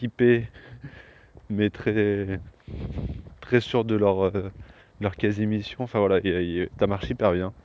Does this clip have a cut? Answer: yes; 1 cut; at 6.7 s

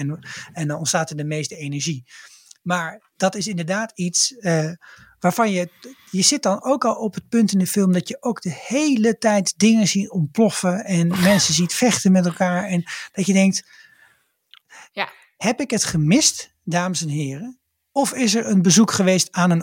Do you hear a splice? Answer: no; 0 cuts

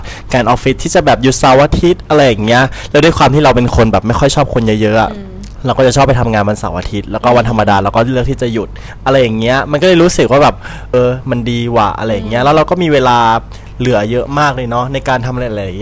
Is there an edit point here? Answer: yes; 1 cut; at 10.9 s

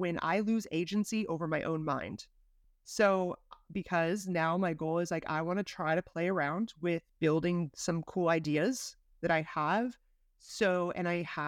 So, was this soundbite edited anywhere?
yes; 2 cuts; at 2.6 s, 7.1 s

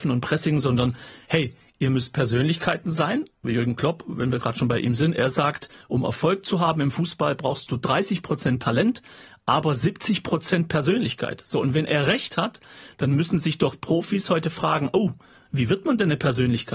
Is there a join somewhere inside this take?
no; 0 cuts

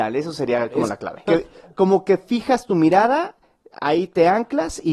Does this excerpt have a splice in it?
yes; 1 cut; at 1.3 s

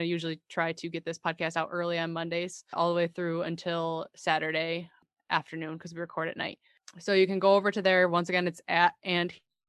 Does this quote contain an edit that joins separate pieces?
yes; 1 cut; at 2.7 s

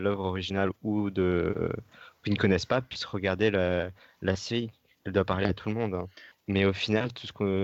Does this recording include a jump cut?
yes; 1 cut; at 6.3 s

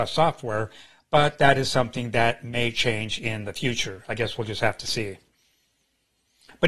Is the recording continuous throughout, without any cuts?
yes; 0 cuts

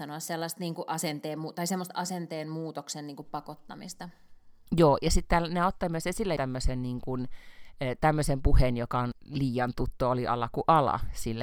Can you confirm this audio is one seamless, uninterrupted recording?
no; 1 cut; at 6.4 s

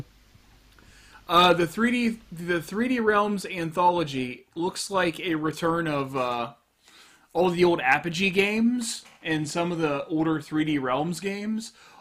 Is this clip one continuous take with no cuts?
yes; 0 cuts

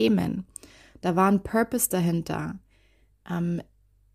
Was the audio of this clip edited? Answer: no; 0 cuts

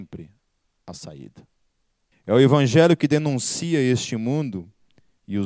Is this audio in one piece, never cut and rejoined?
no; 1 cut; at 2.1 s

